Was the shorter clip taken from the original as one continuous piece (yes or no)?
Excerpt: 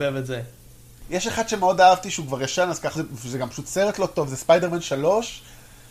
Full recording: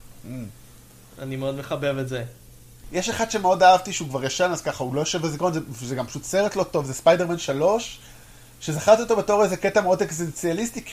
no